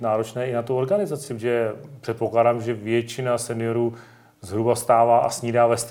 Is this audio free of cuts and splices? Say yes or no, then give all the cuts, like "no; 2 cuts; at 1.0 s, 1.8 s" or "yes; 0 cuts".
yes; 0 cuts